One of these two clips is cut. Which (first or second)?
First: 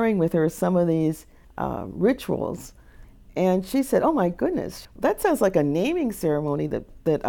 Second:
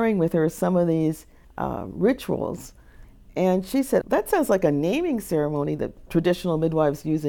second